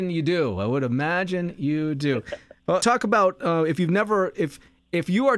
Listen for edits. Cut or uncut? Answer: cut